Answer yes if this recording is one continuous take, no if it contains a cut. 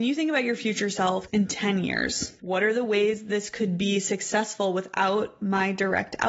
no